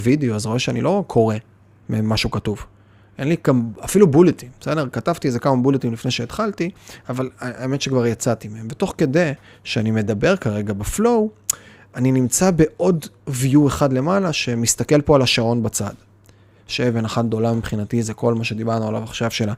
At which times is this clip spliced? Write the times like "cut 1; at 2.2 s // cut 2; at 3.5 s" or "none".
cut 1; at 16.6 s